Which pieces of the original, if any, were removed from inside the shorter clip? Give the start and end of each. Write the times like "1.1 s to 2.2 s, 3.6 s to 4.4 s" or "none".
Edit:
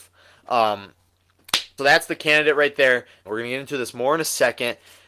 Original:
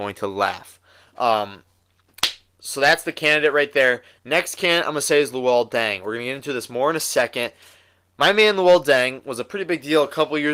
2.5 s to 2.7 s, 4.2 s to 6.0 s